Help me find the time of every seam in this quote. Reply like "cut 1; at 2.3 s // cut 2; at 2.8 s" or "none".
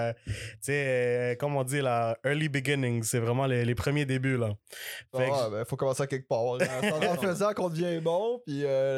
none